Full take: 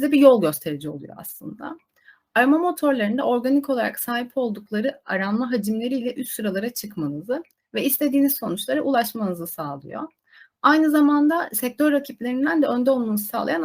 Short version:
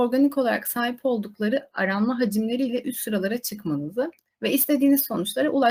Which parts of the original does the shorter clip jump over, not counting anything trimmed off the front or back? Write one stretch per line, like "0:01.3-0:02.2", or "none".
none